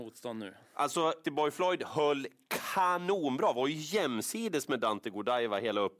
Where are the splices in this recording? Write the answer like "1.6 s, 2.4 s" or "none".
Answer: 1.2 s